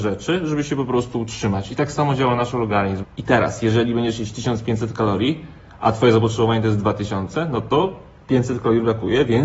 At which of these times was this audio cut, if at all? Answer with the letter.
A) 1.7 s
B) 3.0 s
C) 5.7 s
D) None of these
B